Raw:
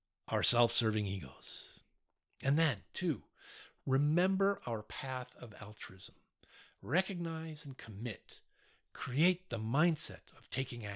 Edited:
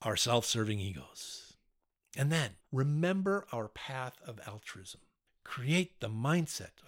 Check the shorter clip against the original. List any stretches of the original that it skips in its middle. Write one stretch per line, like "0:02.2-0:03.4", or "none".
0:02.9-0:03.7
0:06.4-0:08.8